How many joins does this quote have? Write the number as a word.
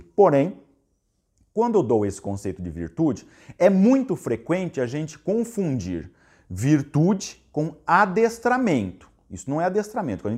zero